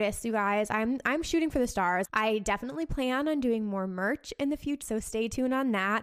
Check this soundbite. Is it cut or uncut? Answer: cut